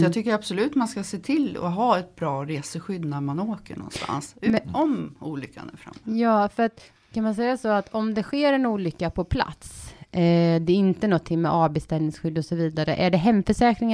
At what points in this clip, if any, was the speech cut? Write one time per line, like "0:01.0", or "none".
none